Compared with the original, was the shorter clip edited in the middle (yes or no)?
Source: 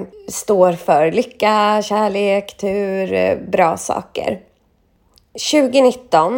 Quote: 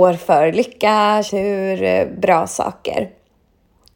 yes